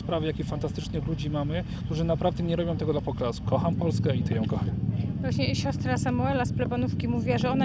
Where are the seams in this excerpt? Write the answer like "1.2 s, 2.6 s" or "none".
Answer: 3.4 s